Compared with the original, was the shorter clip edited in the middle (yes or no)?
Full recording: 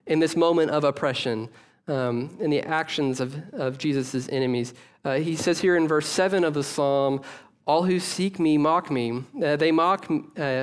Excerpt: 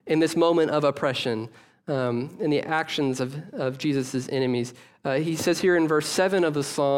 no